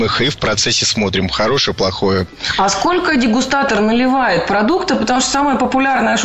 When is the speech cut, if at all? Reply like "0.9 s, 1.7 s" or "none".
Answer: none